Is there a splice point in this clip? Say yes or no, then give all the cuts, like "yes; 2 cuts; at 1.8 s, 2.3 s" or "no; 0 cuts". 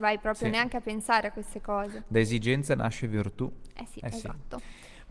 yes; 1 cut; at 4.0 s